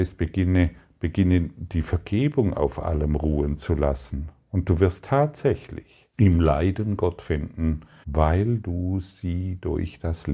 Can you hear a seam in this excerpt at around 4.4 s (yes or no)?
no